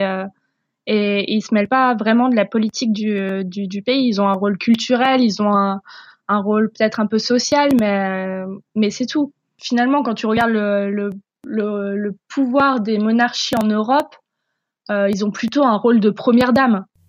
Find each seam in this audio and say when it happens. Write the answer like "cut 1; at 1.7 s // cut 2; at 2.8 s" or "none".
none